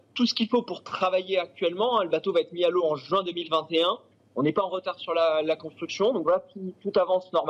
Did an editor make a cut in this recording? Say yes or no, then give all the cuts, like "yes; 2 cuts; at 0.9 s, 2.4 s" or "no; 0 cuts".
no; 0 cuts